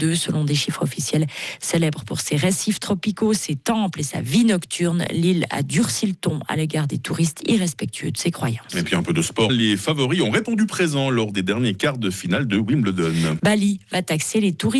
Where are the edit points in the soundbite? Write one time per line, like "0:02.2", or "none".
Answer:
0:09.5
0:13.4